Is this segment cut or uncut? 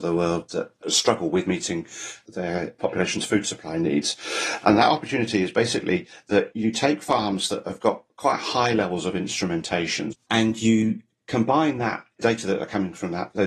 cut